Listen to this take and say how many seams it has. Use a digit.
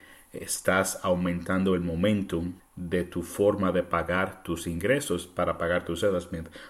1